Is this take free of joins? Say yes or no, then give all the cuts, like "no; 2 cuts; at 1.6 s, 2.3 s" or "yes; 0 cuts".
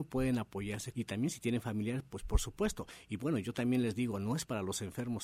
no; 1 cut; at 0.9 s